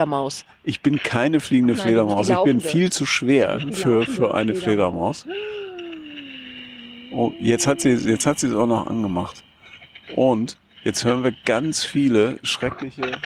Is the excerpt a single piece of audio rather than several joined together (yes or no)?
no